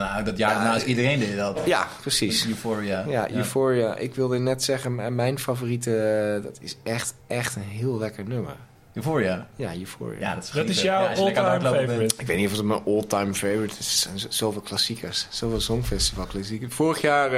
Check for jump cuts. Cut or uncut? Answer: uncut